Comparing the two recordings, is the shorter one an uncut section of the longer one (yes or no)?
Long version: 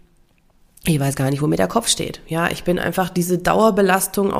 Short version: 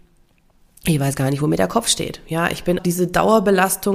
no